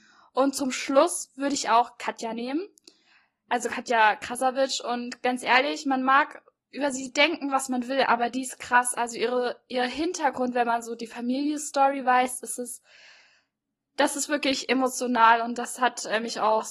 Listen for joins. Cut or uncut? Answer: uncut